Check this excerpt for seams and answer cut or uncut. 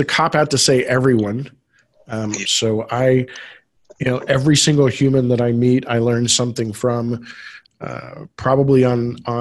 cut